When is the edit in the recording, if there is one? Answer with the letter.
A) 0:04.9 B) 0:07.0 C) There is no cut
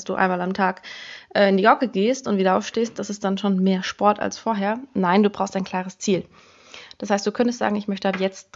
C